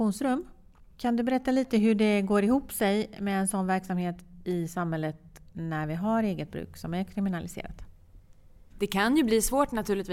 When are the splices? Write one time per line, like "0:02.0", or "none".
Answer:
none